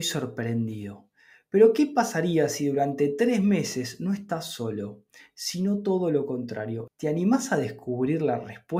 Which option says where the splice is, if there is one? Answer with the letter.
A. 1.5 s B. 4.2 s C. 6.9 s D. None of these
C